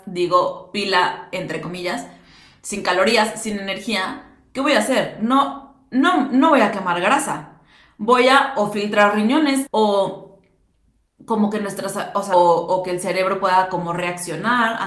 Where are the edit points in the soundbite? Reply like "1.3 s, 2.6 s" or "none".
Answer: 9.7 s, 12.3 s